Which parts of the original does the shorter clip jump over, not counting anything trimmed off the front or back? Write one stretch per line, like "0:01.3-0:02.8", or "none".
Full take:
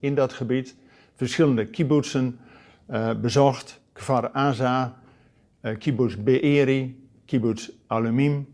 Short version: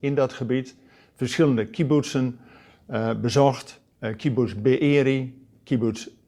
0:03.9-0:05.5